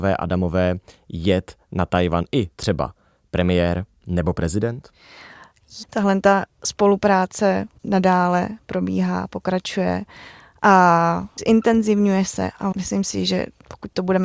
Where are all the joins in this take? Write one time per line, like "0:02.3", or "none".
0:05.8